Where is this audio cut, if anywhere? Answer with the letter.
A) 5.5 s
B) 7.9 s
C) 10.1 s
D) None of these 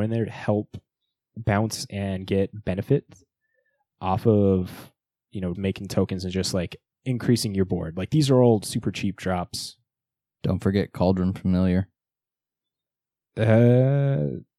A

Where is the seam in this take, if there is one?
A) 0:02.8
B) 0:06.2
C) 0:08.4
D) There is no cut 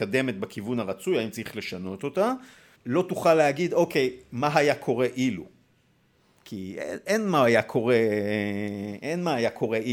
A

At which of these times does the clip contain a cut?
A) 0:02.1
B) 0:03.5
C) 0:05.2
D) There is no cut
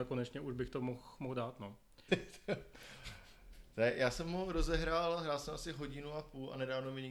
A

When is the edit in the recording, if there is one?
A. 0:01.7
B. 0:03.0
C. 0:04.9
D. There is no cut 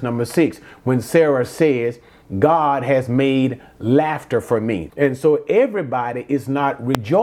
C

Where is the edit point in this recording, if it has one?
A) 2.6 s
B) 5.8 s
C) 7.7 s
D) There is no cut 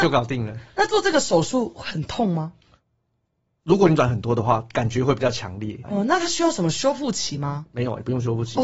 B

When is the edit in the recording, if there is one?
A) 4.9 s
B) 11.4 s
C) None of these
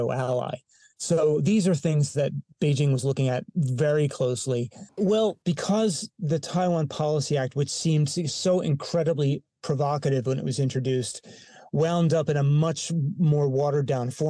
A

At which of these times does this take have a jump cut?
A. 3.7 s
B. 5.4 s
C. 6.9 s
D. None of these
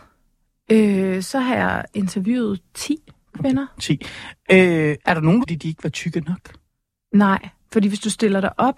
B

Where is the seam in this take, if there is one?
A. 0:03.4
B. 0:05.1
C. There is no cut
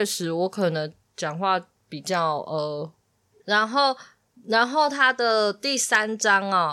A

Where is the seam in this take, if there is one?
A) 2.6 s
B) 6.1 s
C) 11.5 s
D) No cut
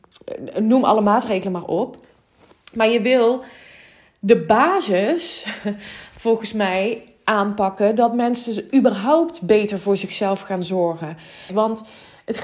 C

